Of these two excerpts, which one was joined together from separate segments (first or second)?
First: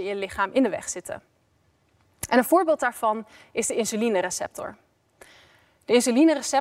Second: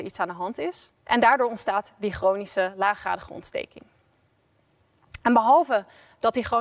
second